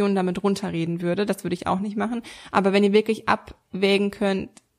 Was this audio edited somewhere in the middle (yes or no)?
no